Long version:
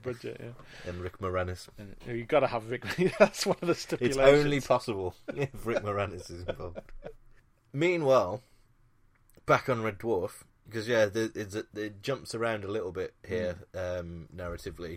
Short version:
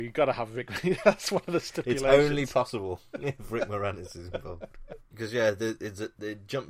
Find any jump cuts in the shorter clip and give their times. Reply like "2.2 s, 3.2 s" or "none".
5.1 s